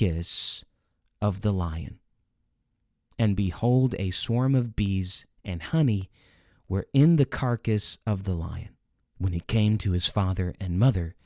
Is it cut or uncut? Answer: cut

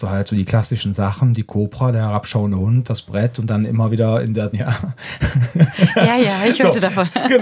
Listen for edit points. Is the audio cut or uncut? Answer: cut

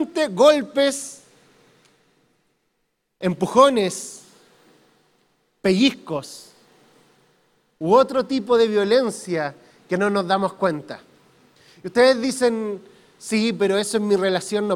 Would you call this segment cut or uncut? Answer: uncut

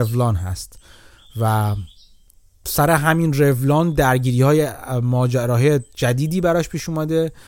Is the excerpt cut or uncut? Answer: uncut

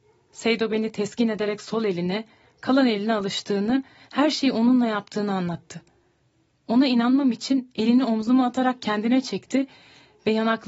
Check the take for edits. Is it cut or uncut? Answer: uncut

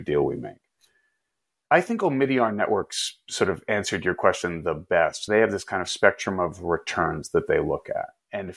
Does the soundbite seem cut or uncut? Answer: uncut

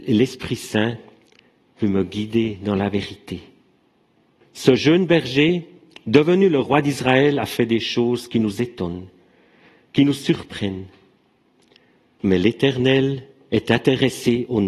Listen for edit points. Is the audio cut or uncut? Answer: cut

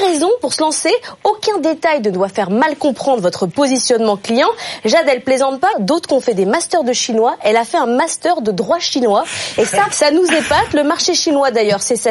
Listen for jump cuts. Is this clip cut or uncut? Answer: cut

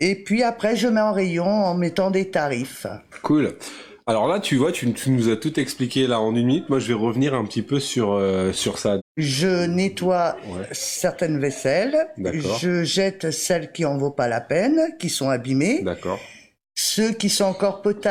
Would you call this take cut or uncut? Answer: cut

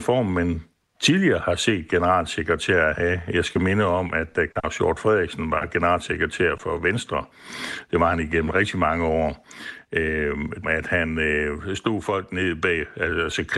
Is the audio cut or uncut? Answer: cut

